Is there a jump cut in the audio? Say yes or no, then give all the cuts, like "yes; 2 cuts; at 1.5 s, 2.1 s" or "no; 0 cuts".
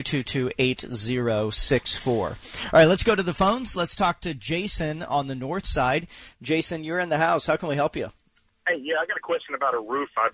no; 0 cuts